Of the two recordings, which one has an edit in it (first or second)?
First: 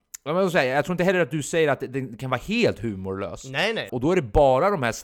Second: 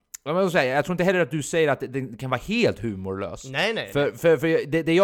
first